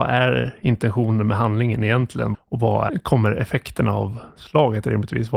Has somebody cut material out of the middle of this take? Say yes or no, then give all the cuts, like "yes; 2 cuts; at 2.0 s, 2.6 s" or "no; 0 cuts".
yes; 1 cut; at 2.3 s